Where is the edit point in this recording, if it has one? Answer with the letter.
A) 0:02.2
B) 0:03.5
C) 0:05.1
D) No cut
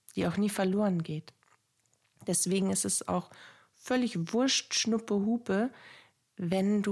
D